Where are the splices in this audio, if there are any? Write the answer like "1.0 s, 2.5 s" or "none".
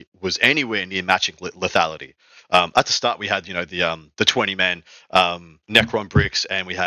5.6 s

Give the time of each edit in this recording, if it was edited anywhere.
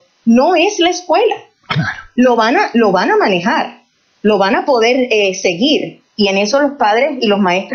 none

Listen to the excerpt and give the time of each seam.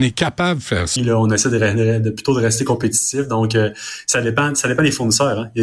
1.0 s

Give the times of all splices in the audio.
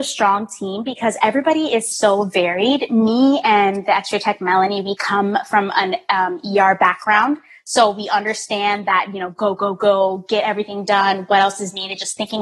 none

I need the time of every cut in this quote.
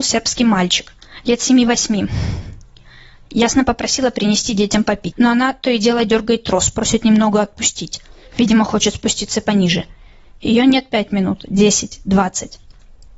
5.1 s

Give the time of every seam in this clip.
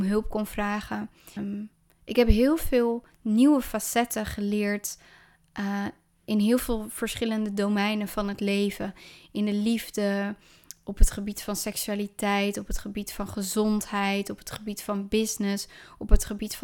1.4 s

